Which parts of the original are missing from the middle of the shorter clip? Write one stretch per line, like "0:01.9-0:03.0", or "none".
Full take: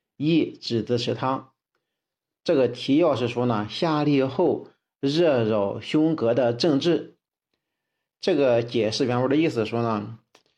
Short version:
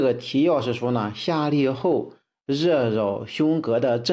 none